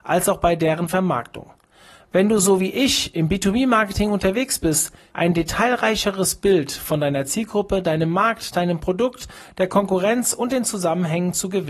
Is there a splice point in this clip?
yes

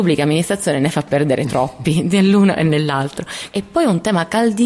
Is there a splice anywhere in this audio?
no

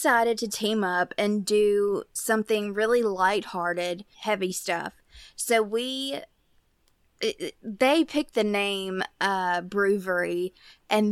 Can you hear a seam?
yes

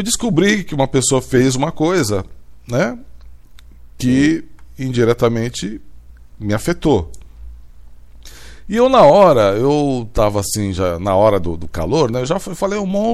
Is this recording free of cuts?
yes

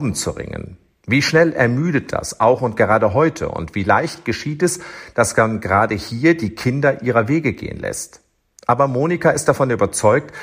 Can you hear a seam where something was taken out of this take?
no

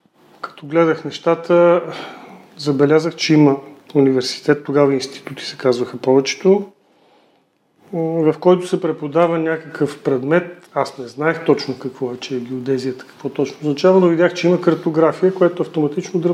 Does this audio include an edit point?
yes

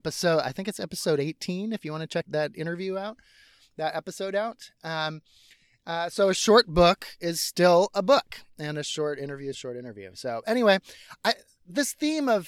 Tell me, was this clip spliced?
yes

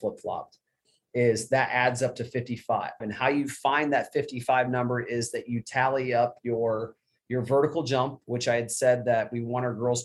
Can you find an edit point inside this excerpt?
yes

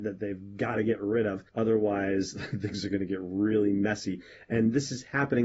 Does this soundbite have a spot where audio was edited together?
yes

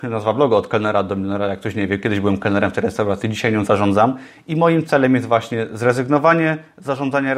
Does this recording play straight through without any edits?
yes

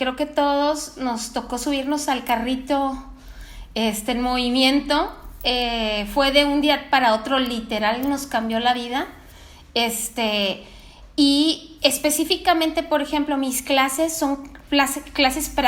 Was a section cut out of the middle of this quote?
no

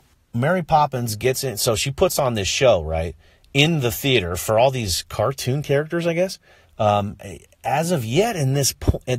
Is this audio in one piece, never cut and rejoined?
no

